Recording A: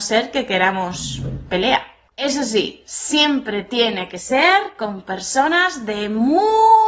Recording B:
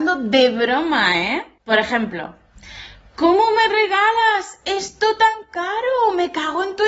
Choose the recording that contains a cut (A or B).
A